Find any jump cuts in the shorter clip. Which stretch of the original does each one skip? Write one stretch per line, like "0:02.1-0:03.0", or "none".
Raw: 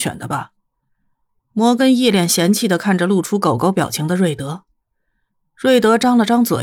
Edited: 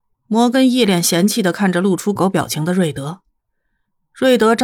0:03.4-0:03.6